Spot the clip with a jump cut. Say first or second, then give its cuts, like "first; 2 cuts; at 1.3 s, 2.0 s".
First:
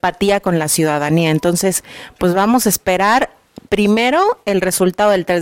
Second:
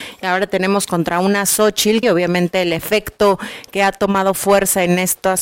second; 1 cut; at 2.0 s